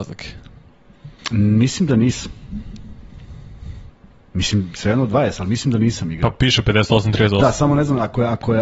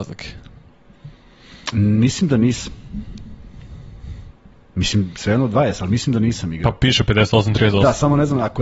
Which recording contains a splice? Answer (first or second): first